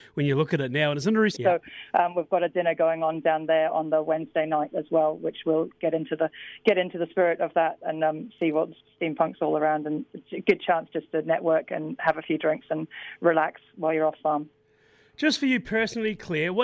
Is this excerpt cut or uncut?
cut